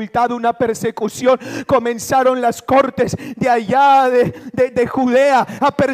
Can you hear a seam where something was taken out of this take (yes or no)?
no